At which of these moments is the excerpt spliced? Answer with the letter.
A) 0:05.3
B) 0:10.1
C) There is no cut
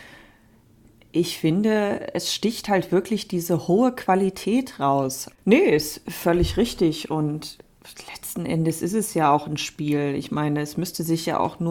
A